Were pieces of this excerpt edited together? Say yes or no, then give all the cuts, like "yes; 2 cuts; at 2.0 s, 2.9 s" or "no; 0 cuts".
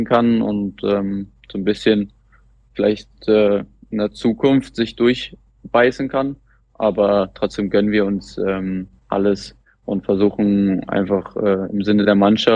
yes; 1 cut; at 9.0 s